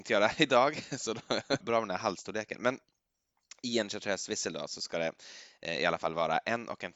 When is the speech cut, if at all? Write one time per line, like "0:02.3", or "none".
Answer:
0:01.6